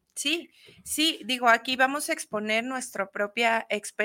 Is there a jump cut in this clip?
no; 0 cuts

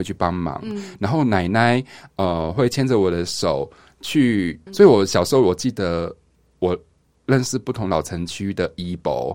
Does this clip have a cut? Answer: yes; 1 cut; at 4.7 s

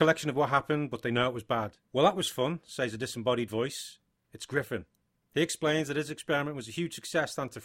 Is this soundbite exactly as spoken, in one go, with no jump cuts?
yes; 0 cuts

